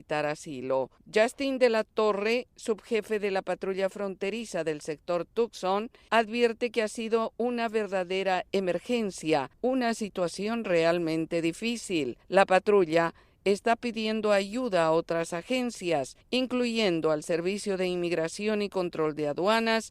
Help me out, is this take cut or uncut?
uncut